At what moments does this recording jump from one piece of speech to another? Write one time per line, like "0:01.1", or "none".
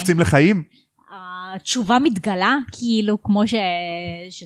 none